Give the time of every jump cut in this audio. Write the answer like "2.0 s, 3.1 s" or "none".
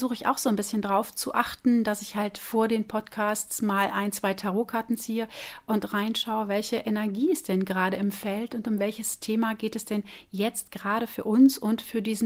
none